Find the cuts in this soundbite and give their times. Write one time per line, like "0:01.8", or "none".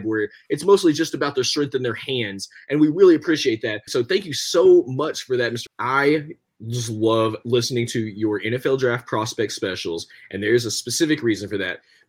0:03.9
0:05.7